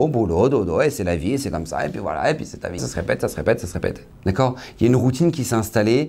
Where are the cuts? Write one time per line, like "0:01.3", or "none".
0:02.8
0:04.1